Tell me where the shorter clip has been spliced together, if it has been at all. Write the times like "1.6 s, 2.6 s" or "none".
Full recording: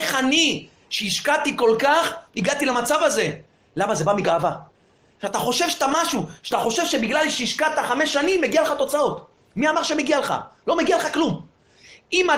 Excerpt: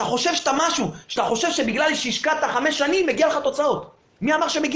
none